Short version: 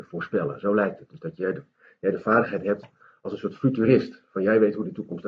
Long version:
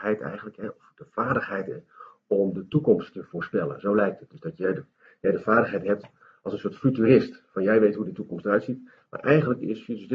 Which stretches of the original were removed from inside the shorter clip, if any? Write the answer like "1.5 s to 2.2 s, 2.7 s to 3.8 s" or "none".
none